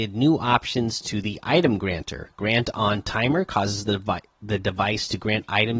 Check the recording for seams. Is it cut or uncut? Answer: uncut